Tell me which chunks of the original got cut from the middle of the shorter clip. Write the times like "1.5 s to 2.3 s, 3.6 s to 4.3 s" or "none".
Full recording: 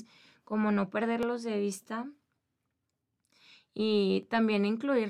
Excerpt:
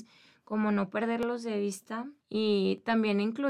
2.2 s to 3.7 s